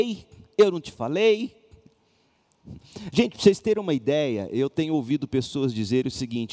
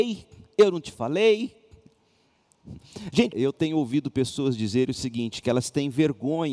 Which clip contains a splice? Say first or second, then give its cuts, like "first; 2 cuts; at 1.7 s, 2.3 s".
second; 1 cut; at 3.3 s